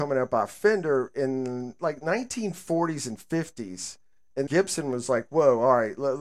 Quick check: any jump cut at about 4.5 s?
yes; 1 cut; at 4.5 s

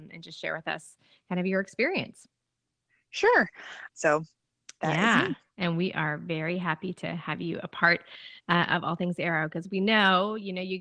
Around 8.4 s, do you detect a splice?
no; 1 cut; at 3.9 s

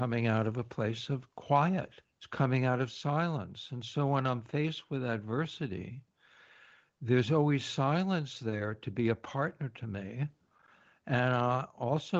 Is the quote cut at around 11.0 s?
no; 1 cut; at 2.0 s

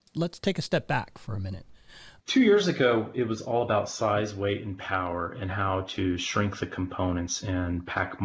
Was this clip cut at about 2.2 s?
yes; 1 cut; at 2.2 s

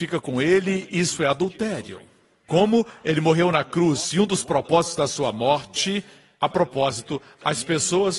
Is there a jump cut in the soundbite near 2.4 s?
yes; 1 cut; at 2.4 s

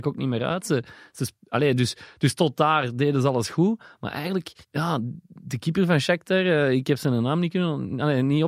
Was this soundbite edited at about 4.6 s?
yes; 1 cut; at 4.6 s

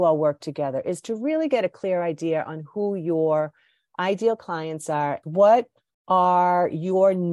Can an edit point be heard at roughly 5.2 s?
yes; 1 cut; at 5.2 s

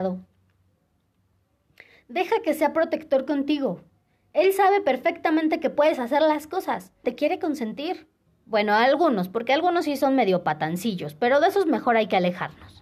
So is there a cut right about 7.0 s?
yes; 2 cuts; at 7.0 s, 8.3 s

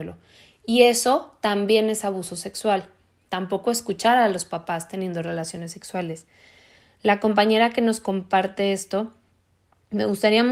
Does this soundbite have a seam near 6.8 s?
no; 1 cut; at 3.3 s

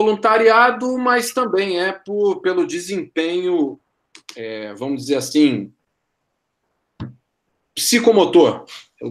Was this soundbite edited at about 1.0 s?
no; 0 cuts

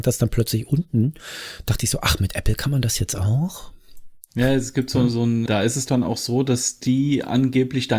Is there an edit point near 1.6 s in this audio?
no; 1 cut; at 5.5 s

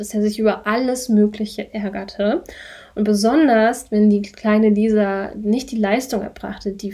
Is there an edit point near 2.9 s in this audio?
no; 0 cuts

